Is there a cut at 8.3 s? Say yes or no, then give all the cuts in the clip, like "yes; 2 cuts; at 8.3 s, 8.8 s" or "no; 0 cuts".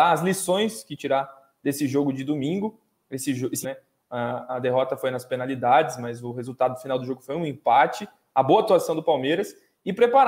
no; 1 cut; at 3.6 s